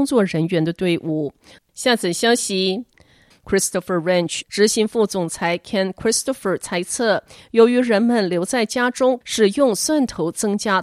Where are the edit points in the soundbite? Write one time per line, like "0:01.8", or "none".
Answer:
0:01.6
0:03.3
0:09.2